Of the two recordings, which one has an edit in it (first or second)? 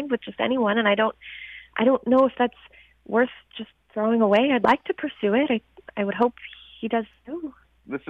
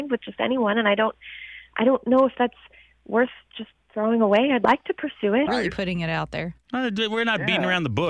second